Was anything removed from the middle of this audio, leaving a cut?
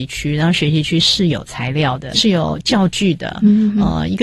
yes; 1 cut; at 2.1 s

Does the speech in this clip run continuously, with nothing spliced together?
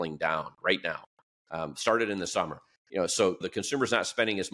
no; 1 cut; at 3.4 s

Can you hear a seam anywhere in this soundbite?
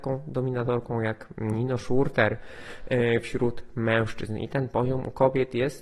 no; 0 cuts

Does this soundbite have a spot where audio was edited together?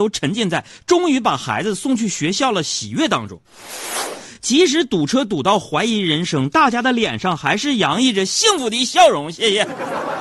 no; 0 cuts

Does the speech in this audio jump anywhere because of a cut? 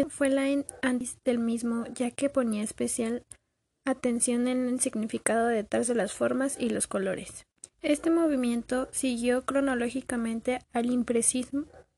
yes; 1 cut; at 7.7 s

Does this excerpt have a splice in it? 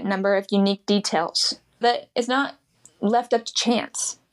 yes; 1 cut; at 1.8 s

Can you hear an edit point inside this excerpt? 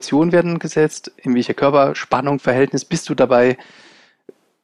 no; 0 cuts

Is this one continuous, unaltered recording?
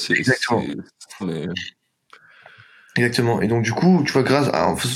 no; 1 cut; at 1.2 s

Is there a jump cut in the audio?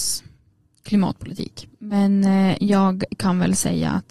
yes; 1 cut; at 1.7 s

